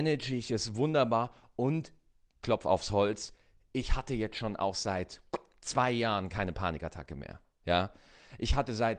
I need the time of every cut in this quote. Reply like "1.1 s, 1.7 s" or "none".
none